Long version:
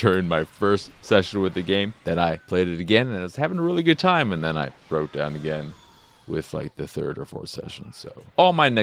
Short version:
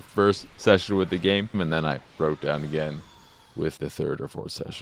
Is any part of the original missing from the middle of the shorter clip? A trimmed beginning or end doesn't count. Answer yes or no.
yes